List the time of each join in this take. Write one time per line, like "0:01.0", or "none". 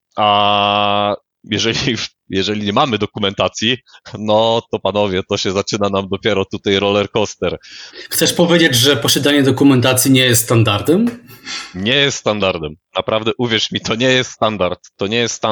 none